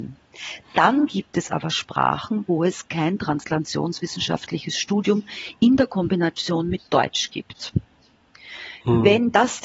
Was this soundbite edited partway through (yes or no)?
no